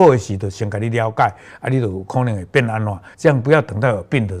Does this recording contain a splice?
yes; 1 cut; at 3.1 s

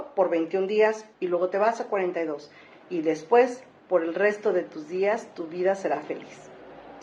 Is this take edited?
yes; 2 cuts; at 1.1 s, 2.7 s

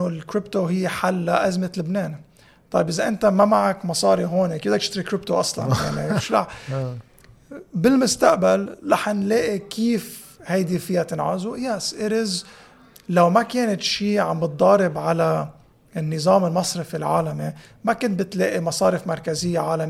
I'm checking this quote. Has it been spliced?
yes; 1 cut; at 6.2 s

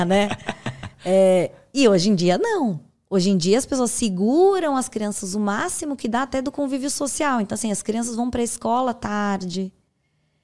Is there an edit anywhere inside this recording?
no; 0 cuts

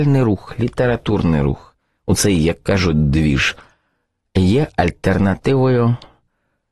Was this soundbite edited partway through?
no; 0 cuts

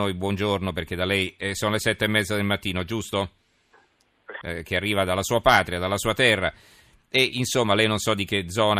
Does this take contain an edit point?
yes; 1 cut; at 4.4 s

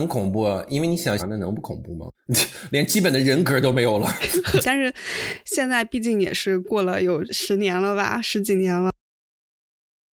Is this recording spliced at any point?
yes; 3 cuts; at 1.2 s, 4.6 s, 7.3 s

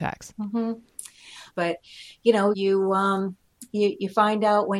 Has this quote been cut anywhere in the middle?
yes; 2 cuts; at 1.5 s, 2.5 s

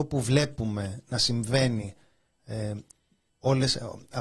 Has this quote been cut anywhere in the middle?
yes; 1 cut; at 3.3 s

